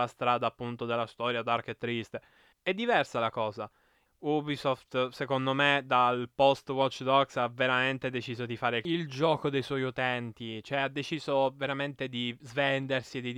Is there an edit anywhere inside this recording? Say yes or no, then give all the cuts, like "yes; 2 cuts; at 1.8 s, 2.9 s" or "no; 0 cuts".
yes; 2 cuts; at 2.5 s, 4.1 s